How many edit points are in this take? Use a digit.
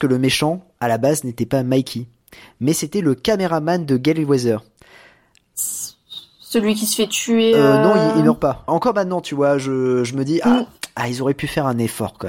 1